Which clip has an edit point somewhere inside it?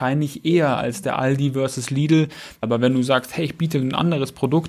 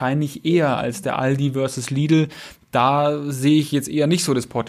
first; 1 cut; at 2.6 s

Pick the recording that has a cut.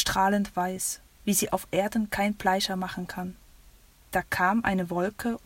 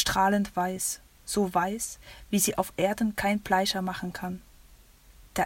first; 2 cuts; at 1.2 s, 4.0 s

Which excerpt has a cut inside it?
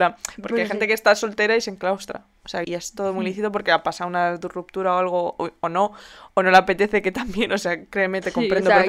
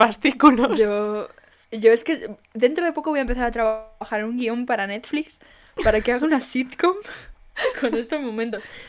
first; 1 cut; at 2.6 s

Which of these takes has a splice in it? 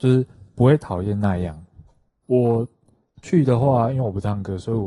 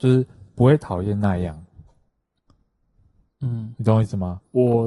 first; 1 cut; at 2.2 s

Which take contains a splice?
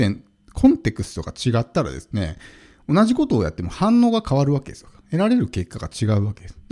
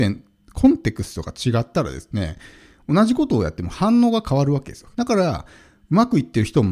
second; 1 cut; at 4.9 s

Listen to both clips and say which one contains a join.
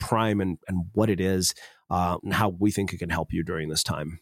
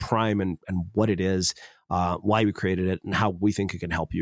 first; 1 cut; at 2.2 s

